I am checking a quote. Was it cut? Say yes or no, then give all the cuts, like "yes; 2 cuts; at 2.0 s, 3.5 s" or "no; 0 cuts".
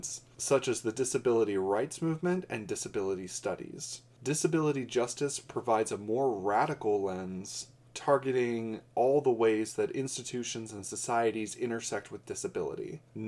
no; 0 cuts